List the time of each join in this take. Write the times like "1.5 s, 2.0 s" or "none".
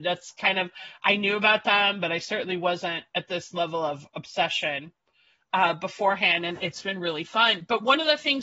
none